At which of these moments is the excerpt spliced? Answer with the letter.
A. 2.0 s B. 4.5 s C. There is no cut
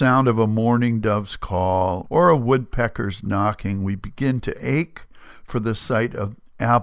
A